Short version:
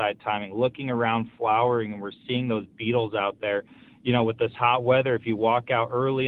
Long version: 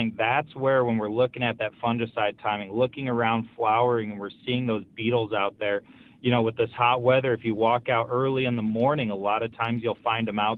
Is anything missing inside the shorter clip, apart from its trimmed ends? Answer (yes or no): no